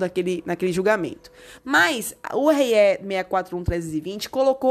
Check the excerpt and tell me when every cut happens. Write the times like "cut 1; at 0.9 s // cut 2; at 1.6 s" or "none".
cut 1; at 1.6 s